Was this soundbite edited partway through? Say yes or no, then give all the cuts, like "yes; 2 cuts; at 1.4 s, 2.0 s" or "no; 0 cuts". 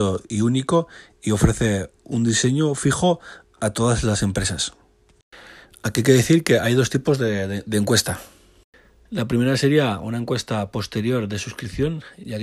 no; 0 cuts